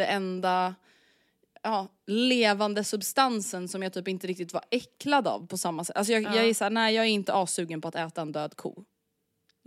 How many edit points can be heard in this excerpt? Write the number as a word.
zero